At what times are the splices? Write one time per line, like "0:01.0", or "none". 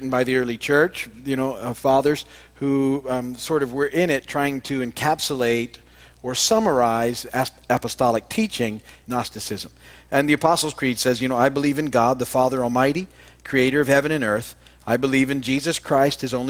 0:09.0